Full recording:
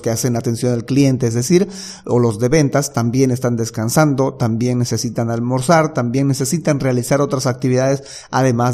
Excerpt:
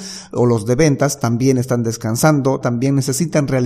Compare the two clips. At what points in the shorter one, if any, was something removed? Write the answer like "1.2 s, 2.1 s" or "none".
2.6 s

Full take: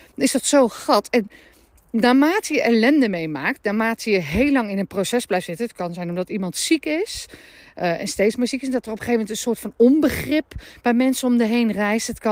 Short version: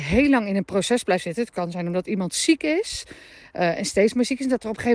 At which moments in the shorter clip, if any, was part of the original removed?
none

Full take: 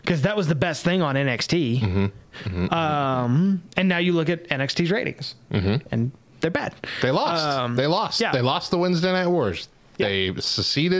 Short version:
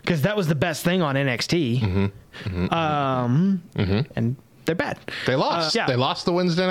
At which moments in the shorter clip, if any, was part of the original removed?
3.7 s, 5.7 s

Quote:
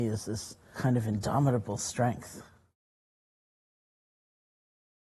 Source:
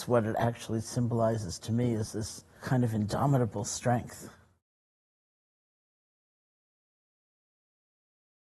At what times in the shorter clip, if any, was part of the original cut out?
none

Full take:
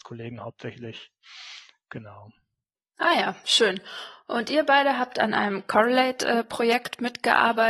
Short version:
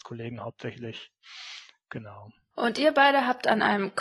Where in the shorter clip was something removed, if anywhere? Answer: 2.5 s

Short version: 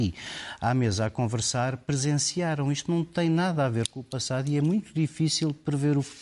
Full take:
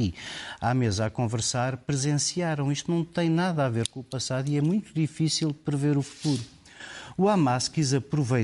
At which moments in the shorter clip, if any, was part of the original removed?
none

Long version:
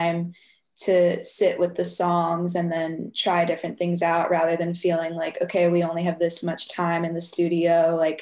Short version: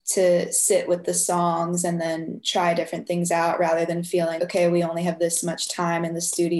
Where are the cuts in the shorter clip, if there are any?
4.4 s

